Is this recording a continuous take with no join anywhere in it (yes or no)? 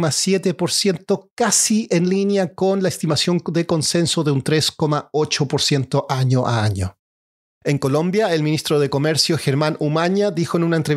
yes